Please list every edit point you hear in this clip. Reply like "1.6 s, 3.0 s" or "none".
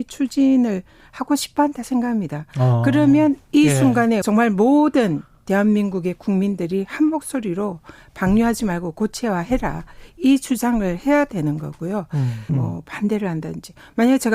4.2 s, 12.5 s